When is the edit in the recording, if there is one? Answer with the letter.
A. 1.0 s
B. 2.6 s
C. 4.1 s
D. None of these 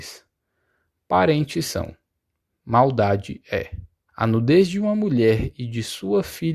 C